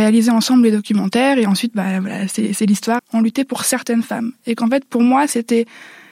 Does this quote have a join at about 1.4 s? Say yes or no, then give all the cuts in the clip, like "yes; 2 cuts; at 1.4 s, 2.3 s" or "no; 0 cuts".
no; 1 cut; at 3.0 s